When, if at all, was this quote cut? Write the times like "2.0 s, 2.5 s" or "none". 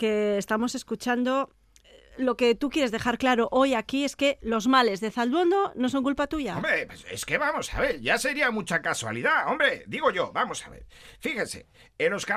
none